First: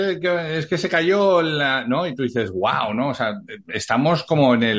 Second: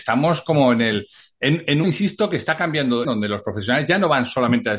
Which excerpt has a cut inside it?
second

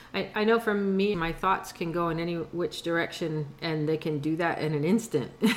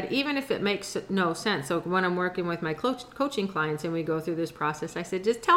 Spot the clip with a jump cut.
first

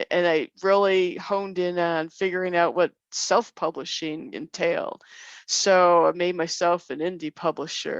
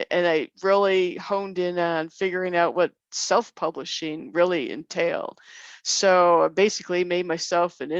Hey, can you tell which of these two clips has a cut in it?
first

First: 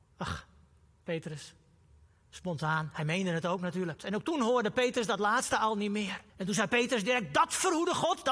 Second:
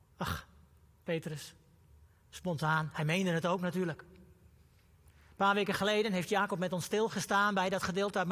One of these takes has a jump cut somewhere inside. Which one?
first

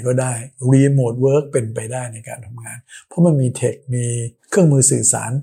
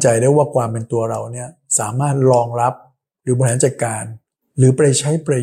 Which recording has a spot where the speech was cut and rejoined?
first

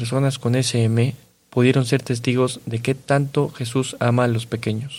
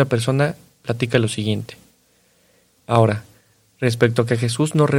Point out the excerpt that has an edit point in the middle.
second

